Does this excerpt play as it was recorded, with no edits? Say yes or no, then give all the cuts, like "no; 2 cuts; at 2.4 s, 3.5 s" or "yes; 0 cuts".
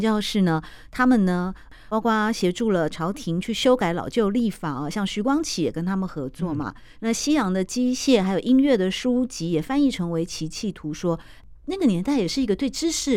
yes; 0 cuts